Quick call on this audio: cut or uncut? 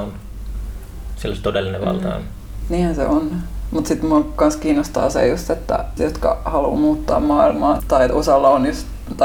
cut